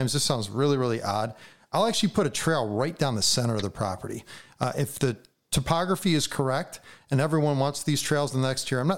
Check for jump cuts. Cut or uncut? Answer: uncut